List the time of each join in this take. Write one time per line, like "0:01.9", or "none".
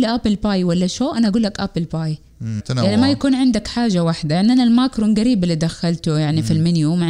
0:02.6

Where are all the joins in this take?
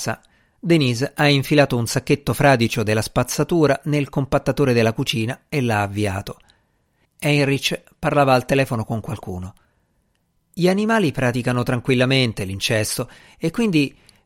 0:07.0

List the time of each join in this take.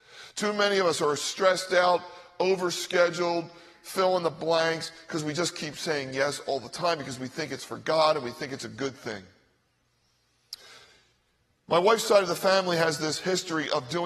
none

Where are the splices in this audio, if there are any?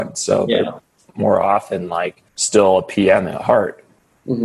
0:02.3

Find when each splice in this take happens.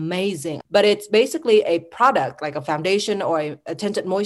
none

